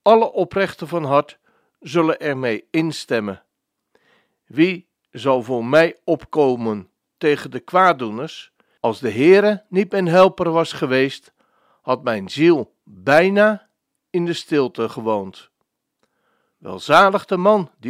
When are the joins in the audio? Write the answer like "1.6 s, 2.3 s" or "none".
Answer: 8.8 s, 16.5 s